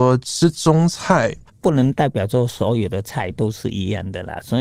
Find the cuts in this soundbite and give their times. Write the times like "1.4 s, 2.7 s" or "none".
1.5 s